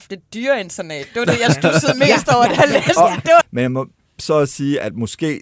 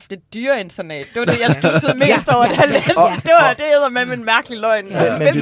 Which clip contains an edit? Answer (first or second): first